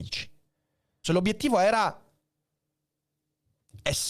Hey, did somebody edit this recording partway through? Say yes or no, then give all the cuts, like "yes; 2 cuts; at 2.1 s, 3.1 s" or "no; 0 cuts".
yes; 1 cut; at 1.0 s